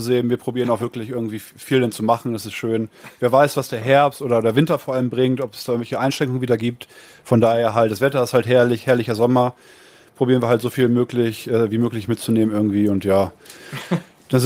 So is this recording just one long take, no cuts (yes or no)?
yes